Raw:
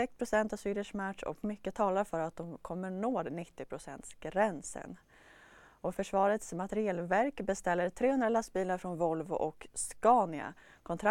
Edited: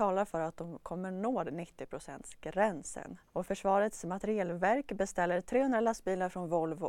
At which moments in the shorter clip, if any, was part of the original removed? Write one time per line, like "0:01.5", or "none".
0:03.3